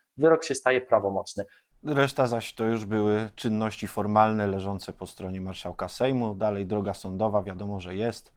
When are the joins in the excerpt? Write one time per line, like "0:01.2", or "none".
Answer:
0:01.7